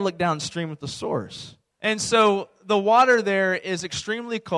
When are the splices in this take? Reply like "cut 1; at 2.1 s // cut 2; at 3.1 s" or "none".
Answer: cut 1; at 1.7 s